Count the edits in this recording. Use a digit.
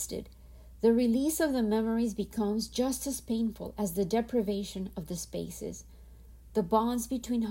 1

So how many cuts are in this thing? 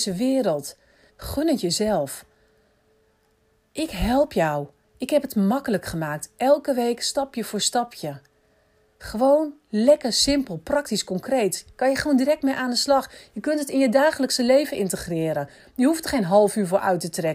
1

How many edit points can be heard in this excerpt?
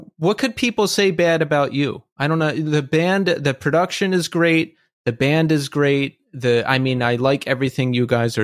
0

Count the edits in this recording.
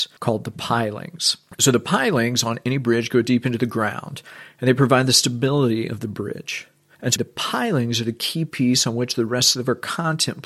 1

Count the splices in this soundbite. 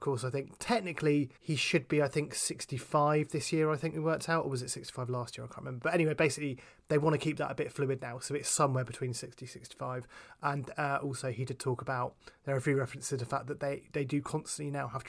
1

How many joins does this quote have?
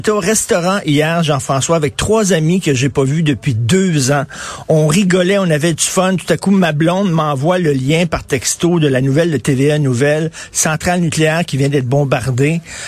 0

